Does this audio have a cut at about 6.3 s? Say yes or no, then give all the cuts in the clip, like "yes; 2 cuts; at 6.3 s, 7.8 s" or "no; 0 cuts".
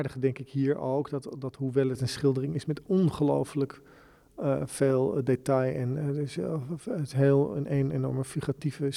no; 0 cuts